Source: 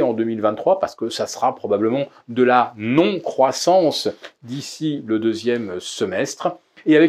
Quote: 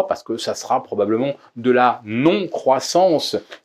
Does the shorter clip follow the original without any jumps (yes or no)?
yes